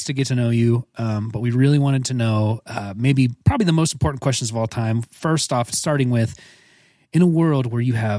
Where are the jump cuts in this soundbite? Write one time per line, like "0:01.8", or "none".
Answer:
none